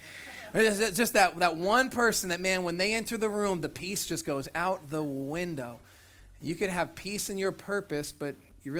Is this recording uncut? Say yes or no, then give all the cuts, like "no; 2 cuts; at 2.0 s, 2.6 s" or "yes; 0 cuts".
yes; 0 cuts